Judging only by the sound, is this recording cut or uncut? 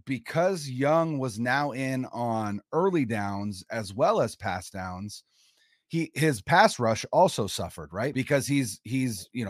cut